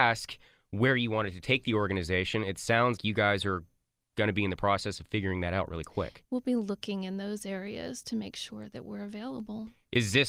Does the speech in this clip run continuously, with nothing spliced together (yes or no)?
no